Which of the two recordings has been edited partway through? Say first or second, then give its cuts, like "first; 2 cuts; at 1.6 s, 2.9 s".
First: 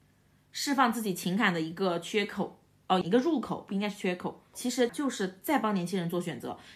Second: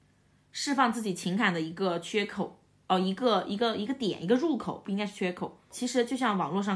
first; 2 cuts; at 3.0 s, 4.9 s